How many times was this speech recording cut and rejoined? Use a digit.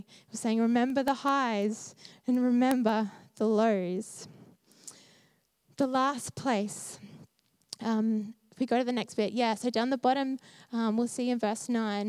0